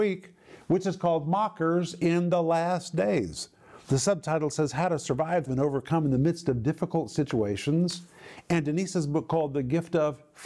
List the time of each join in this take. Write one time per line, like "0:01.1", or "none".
0:03.8
0:05.5